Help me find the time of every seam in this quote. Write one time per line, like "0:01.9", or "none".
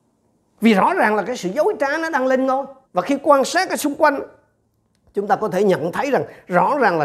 0:02.8